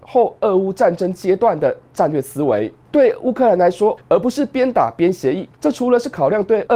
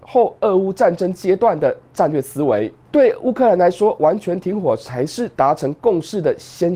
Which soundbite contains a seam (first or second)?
first